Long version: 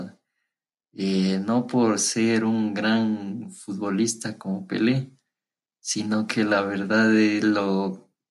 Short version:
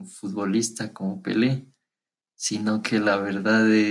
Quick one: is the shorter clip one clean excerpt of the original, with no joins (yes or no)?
yes